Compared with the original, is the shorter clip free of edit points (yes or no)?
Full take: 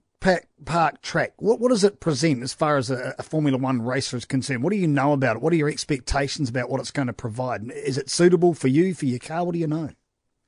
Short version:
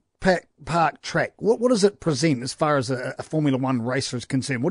yes